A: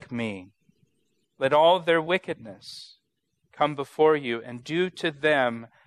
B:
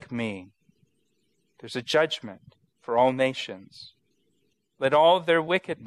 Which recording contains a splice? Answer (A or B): A